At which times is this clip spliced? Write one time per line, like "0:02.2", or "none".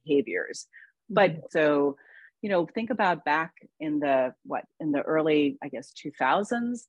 0:01.5